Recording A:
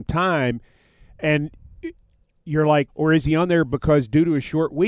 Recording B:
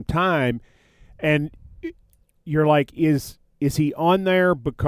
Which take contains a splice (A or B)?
A